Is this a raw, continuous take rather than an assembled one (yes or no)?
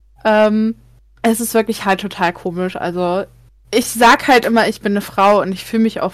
yes